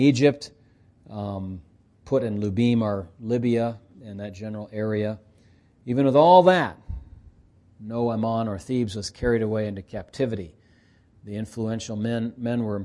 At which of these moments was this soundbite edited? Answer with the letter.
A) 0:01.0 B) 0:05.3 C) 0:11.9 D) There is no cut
D